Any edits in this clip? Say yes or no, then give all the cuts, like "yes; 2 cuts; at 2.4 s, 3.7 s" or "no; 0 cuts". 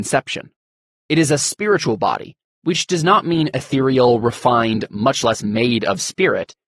no; 0 cuts